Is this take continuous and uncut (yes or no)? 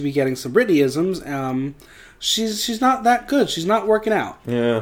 yes